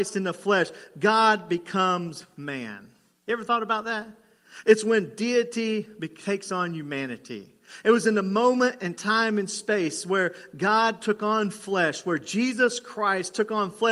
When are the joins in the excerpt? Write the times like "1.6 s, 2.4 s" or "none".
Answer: none